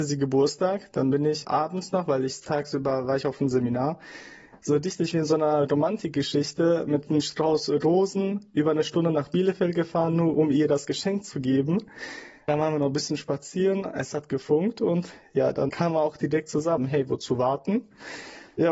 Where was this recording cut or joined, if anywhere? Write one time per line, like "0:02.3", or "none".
0:15.7
0:16.8